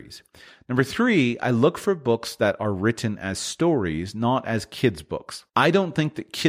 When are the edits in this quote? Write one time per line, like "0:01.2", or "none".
0:05.5